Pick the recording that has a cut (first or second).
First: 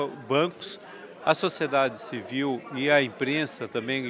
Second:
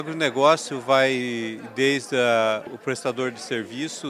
second